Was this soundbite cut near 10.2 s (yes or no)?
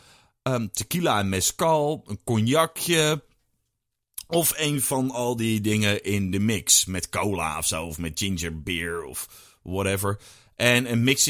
no